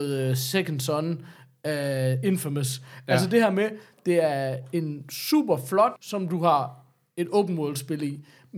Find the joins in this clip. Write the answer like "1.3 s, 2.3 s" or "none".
6.0 s